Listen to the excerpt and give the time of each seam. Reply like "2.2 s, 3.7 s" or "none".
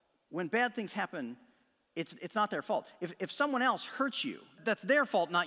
4.6 s